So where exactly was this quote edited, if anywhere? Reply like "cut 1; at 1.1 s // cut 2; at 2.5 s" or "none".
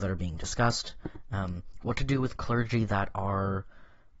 none